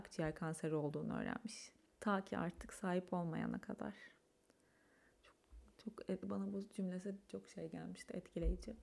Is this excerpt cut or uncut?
cut